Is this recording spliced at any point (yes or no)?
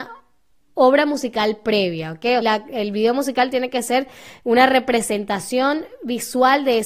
yes